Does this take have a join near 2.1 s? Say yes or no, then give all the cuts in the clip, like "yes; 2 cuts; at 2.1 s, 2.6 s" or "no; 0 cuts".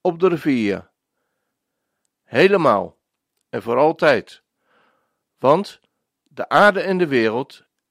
yes; 1 cut; at 2.1 s